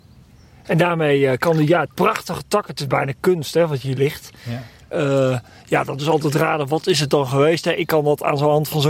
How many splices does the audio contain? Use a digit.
2